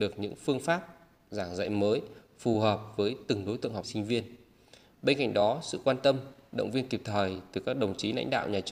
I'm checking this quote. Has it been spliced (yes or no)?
yes